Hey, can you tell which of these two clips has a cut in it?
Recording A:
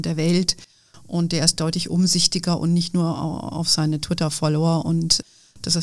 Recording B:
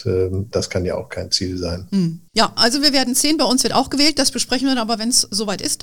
B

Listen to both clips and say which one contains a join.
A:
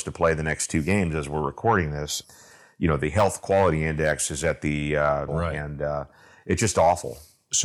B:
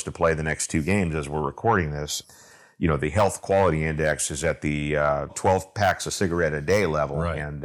A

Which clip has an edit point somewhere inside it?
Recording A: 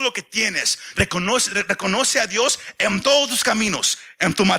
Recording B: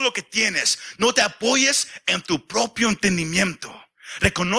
A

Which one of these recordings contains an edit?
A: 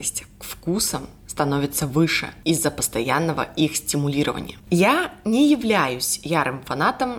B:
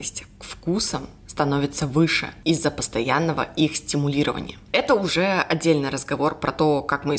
A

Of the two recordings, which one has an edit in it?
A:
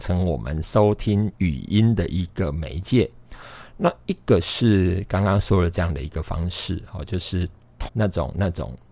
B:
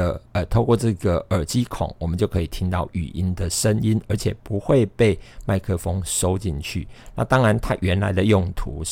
A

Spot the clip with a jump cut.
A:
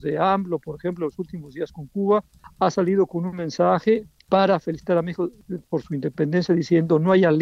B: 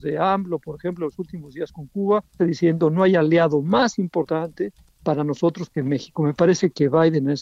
B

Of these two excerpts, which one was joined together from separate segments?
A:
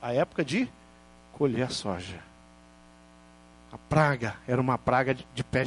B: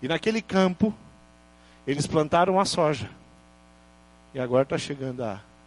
A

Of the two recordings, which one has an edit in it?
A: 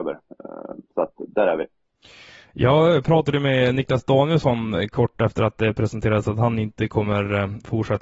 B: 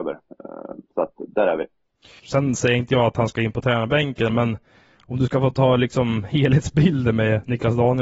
B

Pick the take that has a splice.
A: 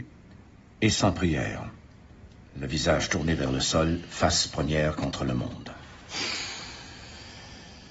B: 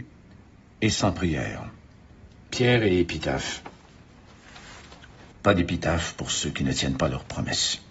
B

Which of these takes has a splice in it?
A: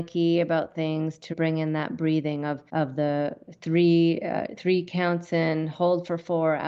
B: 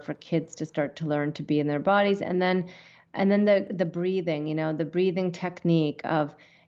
A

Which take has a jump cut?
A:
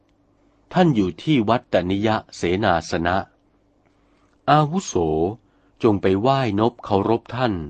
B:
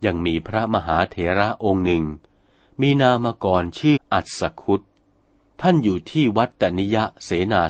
B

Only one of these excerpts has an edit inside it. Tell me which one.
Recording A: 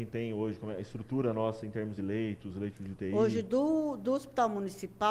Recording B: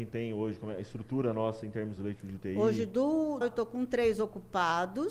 B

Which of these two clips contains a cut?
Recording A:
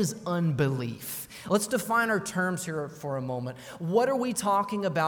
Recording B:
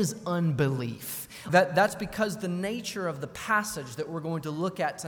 B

